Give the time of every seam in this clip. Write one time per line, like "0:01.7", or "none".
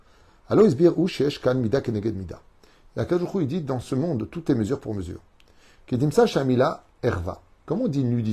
none